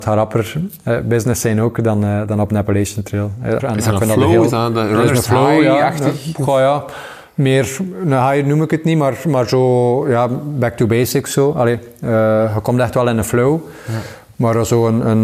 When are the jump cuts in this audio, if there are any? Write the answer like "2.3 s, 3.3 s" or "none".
3.6 s